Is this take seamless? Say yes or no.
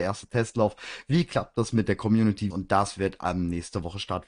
no